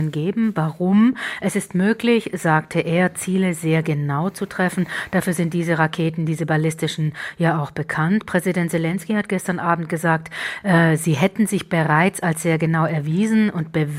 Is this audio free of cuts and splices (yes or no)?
yes